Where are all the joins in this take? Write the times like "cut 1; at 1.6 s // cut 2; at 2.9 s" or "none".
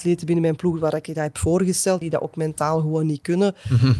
cut 1; at 2.0 s